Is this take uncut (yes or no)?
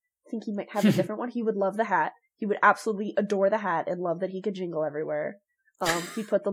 yes